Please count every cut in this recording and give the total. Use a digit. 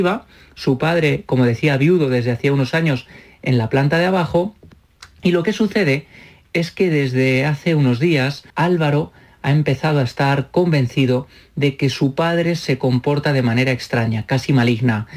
1